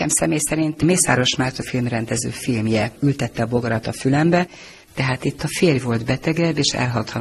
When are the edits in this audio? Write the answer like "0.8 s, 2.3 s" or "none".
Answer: 4.9 s